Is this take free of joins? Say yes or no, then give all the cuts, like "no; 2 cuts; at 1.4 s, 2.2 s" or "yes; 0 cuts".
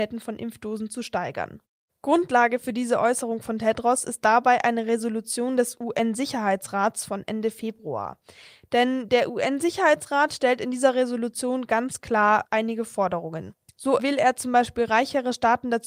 yes; 0 cuts